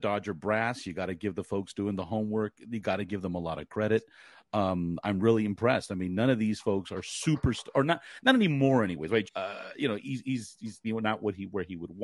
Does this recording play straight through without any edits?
no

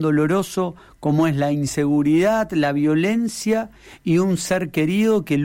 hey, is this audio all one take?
yes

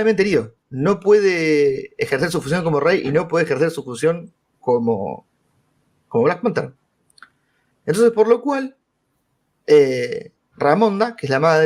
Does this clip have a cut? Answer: no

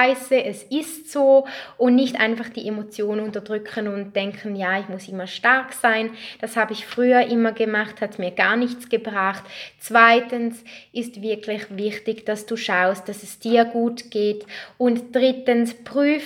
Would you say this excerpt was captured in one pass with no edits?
yes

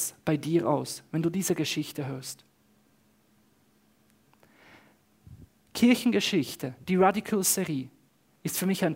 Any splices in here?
no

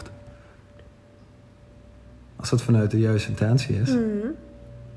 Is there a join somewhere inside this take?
no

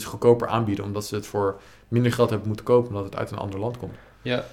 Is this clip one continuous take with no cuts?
yes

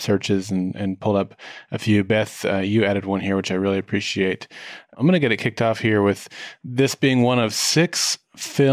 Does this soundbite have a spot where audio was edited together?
no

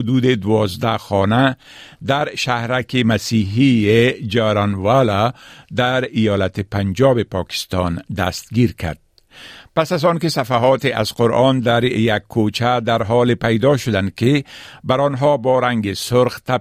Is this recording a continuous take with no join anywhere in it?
yes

